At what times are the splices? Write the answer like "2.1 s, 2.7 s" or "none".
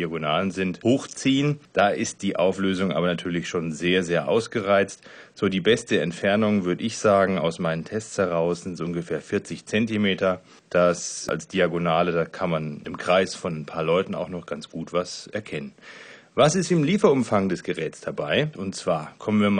18.5 s